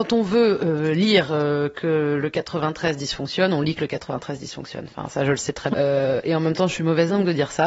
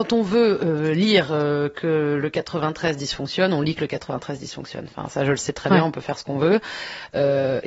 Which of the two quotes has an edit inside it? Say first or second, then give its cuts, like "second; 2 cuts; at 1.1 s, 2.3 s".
first; 1 cut; at 5.7 s